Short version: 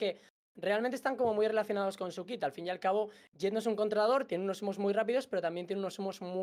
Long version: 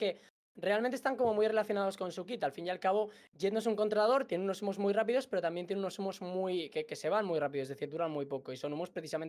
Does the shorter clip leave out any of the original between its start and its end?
no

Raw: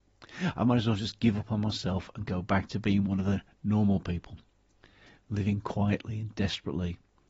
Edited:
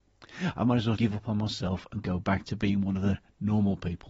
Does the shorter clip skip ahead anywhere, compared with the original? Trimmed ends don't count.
yes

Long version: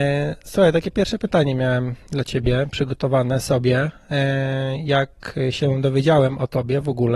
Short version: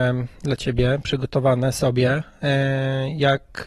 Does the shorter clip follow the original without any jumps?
yes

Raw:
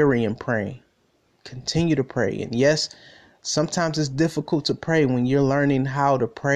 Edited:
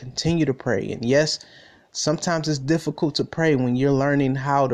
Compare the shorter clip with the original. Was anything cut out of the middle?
no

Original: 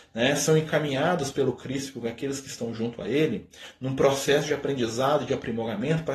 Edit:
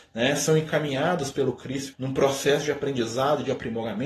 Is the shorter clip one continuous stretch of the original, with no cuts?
no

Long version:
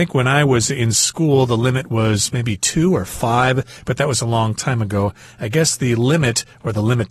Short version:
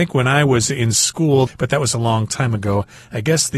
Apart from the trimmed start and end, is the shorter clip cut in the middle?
yes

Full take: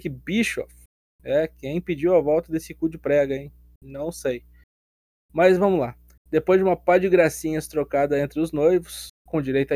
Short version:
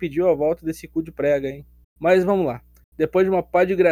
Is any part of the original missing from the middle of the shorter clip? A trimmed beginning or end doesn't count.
yes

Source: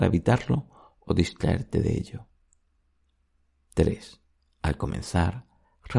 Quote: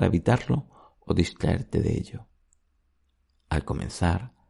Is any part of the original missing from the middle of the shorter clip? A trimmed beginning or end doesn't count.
yes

